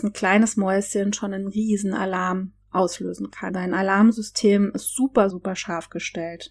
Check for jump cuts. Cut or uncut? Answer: cut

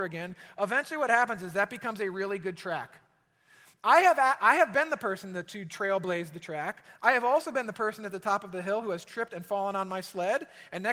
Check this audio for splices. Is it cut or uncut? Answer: uncut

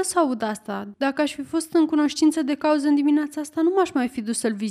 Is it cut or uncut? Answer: cut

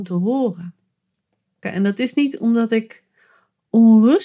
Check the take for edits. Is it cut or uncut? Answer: cut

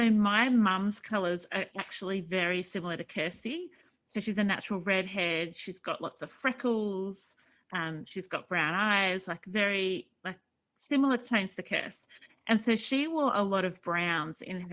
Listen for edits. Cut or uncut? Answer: uncut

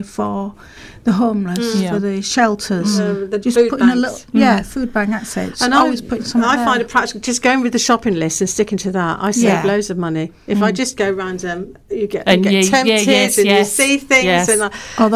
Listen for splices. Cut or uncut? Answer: uncut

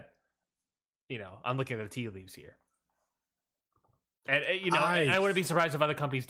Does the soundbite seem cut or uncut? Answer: uncut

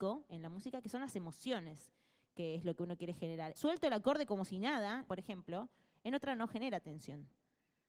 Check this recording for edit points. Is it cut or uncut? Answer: cut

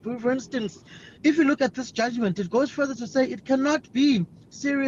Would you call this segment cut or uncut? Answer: cut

